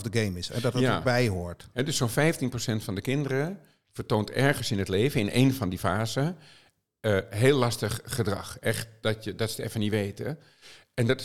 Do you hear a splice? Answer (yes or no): no